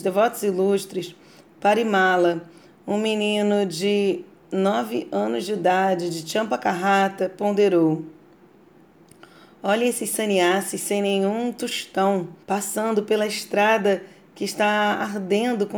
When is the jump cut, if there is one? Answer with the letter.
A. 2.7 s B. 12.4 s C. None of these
B